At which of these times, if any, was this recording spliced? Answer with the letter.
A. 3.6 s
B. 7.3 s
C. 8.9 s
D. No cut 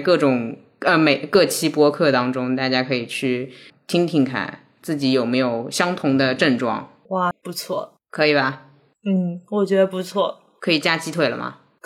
B